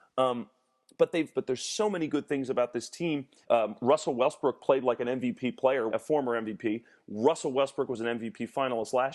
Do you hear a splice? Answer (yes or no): yes